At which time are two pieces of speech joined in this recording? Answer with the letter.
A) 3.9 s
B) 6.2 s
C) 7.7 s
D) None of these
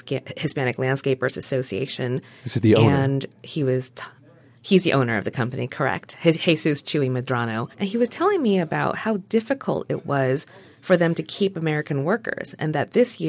C